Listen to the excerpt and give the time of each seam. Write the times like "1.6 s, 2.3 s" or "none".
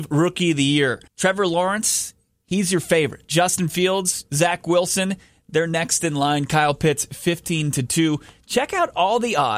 1.1 s

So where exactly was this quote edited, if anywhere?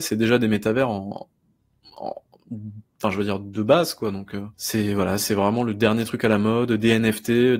4.5 s

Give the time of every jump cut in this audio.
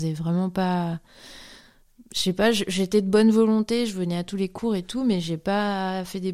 none

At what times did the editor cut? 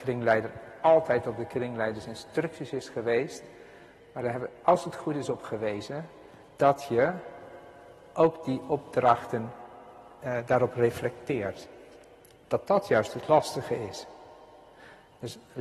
none

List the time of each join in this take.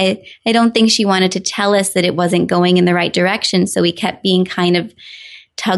none

